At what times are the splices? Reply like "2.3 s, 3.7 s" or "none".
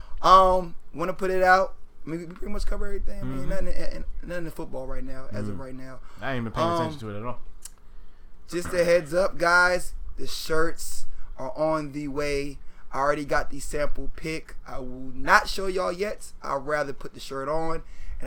none